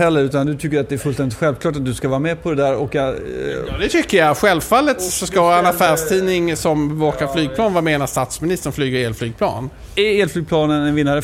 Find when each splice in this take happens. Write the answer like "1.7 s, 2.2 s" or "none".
none